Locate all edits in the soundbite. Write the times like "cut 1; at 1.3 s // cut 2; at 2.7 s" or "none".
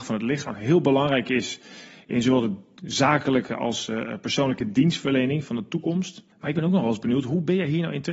cut 1; at 6.3 s